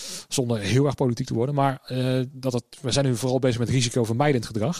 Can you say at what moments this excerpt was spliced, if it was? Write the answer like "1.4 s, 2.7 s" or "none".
2.3 s